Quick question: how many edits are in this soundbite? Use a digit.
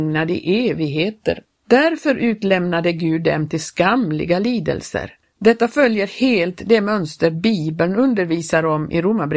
2